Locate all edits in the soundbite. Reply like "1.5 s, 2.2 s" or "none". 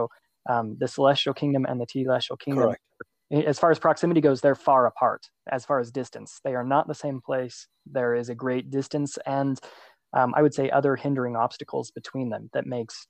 none